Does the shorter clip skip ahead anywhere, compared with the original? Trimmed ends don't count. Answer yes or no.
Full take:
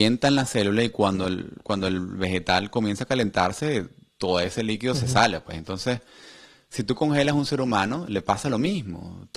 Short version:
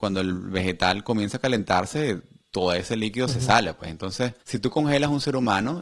yes